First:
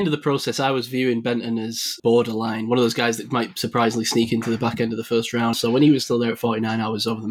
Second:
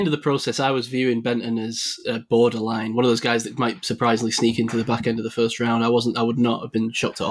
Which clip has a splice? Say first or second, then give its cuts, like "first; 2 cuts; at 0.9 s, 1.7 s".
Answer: first; 2 cuts; at 2.0 s, 5.5 s